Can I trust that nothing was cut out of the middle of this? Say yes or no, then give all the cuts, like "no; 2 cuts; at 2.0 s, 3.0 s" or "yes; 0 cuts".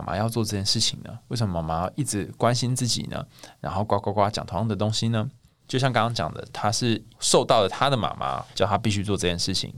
no; 2 cuts; at 5.6 s, 8.5 s